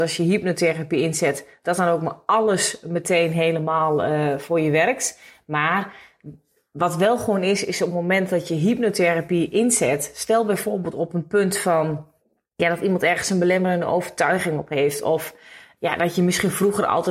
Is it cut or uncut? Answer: uncut